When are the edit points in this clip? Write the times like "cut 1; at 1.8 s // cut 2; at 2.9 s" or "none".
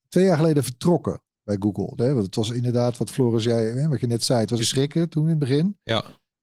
cut 1; at 2.0 s // cut 2; at 4.6 s